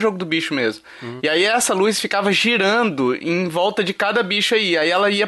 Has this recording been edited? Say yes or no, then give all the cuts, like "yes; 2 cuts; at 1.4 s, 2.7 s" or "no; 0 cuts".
yes; 1 cut; at 1.2 s